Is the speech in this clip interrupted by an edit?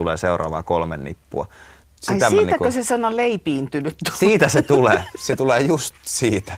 no; 0 cuts

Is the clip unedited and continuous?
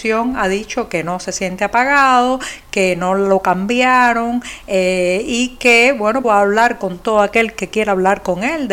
no; 1 cut; at 6.2 s

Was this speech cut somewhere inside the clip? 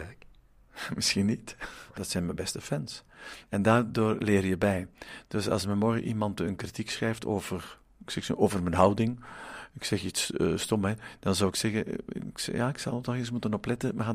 yes; 2 cuts; at 2.0 s, 3.5 s

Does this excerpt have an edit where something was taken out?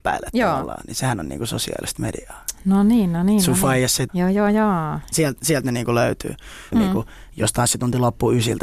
yes; 3 cuts; at 4.1 s, 5.1 s, 6.7 s

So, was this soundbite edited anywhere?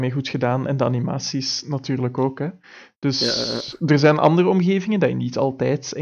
no; 0 cuts

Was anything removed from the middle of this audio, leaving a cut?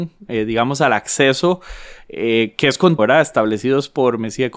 yes; 1 cut; at 3.0 s

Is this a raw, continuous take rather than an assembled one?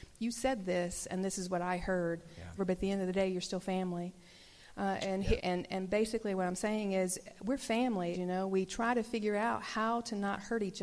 no; 3 cuts; at 2.6 s, 5.4 s, 8.1 s

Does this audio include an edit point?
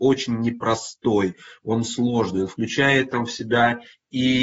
no; 0 cuts

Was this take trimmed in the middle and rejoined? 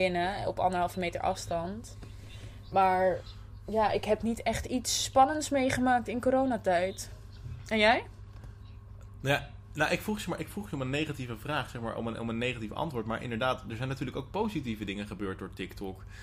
yes; 1 cut; at 2.7 s

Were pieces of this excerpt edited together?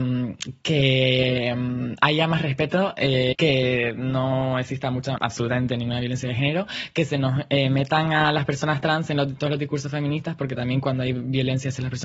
yes; 2 cuts; at 3.3 s, 5.2 s

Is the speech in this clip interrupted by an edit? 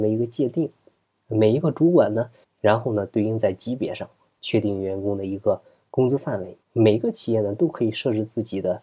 yes; 2 cuts; at 2.4 s, 6.6 s

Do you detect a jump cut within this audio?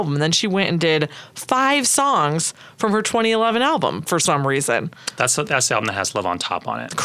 no; 0 cuts

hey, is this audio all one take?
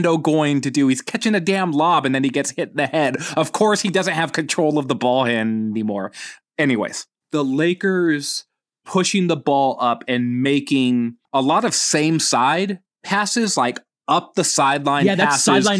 no; 1 cut; at 11.3 s

